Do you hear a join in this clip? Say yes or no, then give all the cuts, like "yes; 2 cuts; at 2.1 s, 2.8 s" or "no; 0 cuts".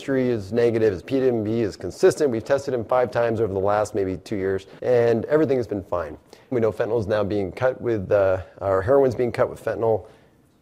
yes; 2 cuts; at 4.8 s, 6.5 s